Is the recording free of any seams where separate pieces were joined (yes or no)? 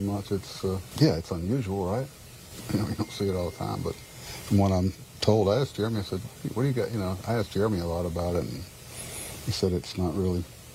no